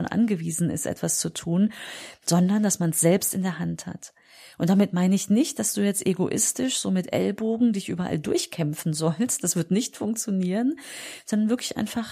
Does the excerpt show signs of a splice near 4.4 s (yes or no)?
no